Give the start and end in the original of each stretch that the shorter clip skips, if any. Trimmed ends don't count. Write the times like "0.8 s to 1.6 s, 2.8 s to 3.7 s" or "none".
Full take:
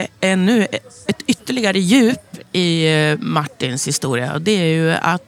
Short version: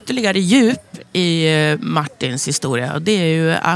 none